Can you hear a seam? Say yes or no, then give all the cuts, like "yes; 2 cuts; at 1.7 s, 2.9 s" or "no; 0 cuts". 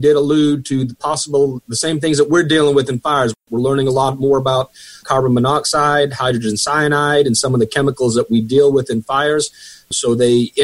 no; 0 cuts